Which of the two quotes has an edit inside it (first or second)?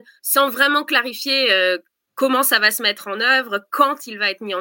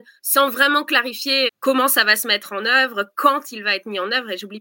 second